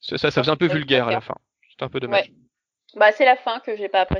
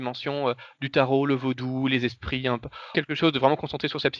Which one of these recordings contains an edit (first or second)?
second